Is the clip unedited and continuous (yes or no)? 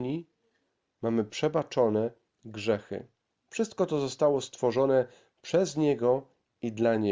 no